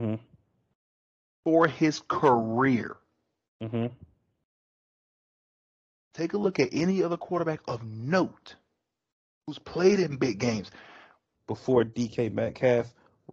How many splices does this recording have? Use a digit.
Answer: 1